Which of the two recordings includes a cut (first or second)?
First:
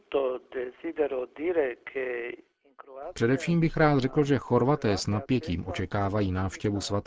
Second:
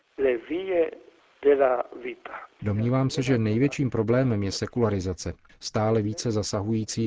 second